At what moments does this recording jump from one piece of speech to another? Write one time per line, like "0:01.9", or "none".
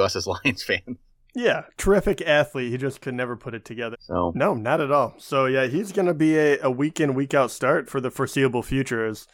0:03.9
0:07.9